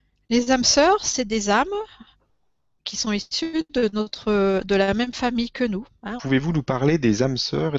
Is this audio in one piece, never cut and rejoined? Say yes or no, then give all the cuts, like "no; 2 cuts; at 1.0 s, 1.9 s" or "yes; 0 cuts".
no; 1 cut; at 6.2 s